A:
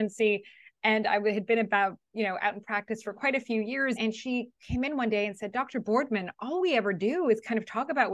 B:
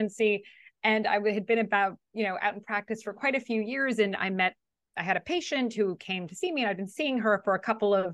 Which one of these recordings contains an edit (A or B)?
A